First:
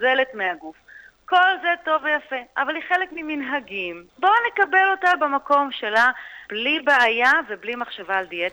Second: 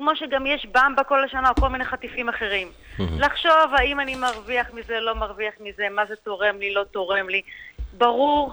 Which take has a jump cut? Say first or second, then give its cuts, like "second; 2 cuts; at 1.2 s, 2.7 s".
first; 2 cuts; at 4.1 s, 6.5 s